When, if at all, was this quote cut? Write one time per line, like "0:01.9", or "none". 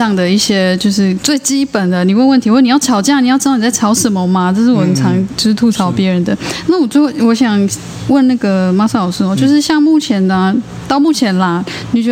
none